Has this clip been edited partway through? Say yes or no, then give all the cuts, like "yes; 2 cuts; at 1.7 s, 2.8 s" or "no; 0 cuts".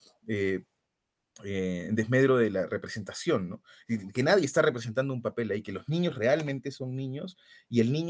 no; 0 cuts